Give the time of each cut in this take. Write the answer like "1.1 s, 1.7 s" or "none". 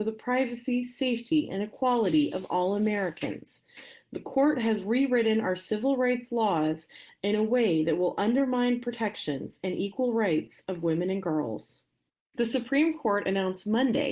12.3 s

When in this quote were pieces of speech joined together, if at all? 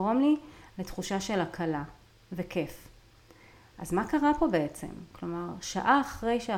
none

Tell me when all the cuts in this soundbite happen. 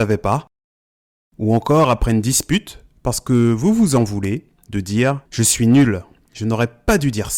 5.3 s

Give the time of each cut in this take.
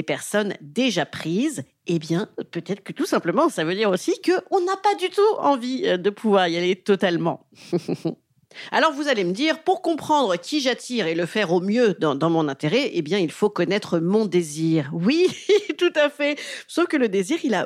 none

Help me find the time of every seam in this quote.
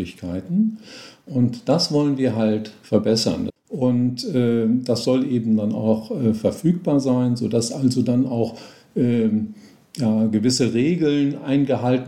3.5 s

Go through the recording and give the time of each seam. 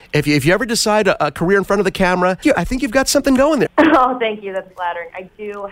2.4 s, 3.7 s, 4.7 s

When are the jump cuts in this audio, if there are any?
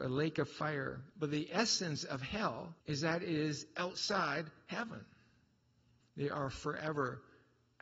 1.1 s, 2.8 s, 6.0 s

